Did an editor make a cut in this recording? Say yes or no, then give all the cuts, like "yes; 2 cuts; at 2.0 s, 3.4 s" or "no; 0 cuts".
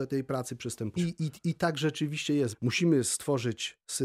yes; 2 cuts; at 1.0 s, 2.5 s